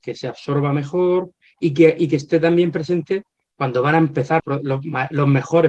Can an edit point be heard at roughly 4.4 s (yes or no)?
yes